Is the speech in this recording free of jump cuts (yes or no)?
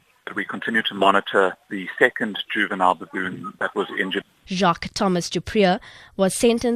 no